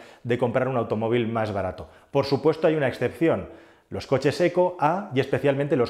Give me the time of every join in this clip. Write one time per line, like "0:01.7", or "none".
none